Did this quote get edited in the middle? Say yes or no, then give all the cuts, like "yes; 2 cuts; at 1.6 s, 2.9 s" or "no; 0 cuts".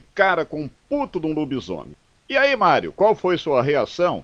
no; 0 cuts